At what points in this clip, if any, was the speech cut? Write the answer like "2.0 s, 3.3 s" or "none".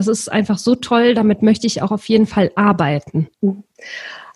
3.3 s